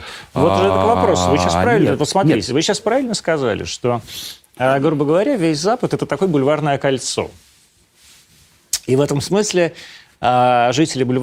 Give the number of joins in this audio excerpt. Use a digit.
0